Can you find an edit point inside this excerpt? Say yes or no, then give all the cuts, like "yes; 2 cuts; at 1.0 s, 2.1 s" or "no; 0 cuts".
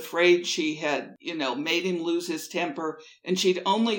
no; 0 cuts